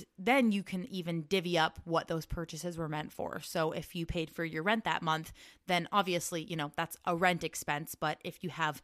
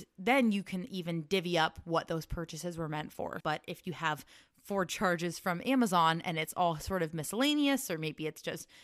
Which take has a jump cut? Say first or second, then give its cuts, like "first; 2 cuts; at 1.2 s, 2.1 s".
second; 1 cut; at 3.4 s